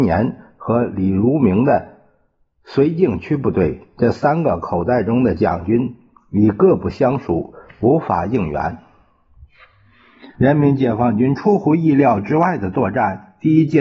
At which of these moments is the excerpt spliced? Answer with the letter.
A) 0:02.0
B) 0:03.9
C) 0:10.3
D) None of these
C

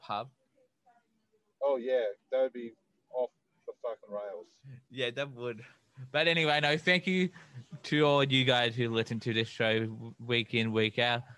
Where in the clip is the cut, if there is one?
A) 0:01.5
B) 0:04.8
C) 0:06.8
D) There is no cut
D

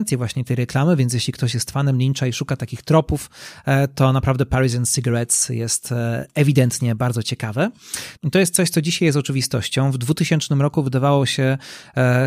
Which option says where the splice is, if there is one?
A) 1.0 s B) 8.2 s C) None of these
B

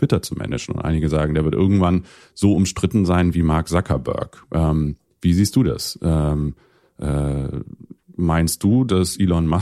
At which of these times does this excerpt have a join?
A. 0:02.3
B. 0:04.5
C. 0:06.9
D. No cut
D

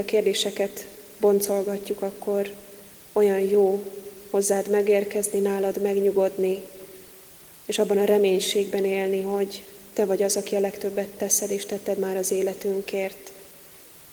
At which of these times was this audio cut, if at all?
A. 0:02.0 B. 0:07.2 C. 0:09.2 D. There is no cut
D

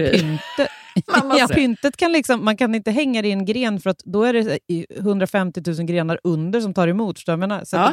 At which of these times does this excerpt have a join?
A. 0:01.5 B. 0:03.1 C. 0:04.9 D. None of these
A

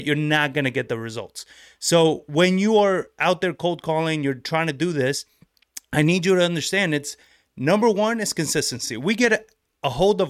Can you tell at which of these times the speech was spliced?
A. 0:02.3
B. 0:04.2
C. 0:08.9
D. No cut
D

